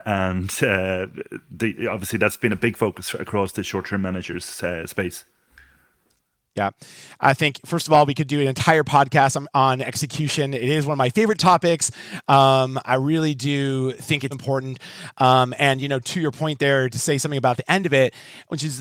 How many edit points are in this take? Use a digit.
1